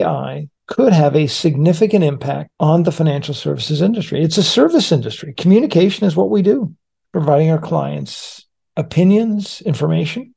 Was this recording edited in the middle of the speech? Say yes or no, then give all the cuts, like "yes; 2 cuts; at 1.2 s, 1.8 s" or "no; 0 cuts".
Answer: no; 0 cuts